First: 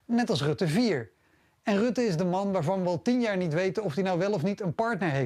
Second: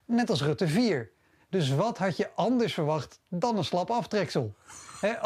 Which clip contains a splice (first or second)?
second